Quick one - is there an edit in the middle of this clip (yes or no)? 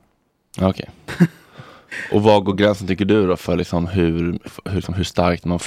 yes